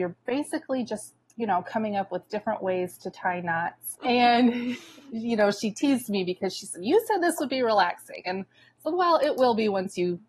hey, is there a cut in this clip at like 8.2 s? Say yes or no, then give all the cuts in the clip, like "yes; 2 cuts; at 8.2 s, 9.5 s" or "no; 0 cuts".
no; 2 cuts; at 1.2 s, 3.9 s